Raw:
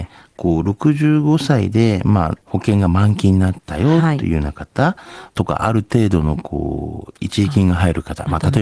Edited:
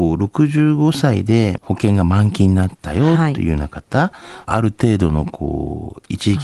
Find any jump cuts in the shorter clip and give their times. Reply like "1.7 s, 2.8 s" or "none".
1.6 s, 4.5 s